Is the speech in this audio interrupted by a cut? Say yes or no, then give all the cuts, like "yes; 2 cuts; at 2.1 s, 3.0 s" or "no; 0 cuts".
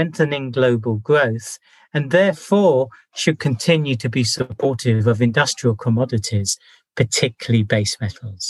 no; 0 cuts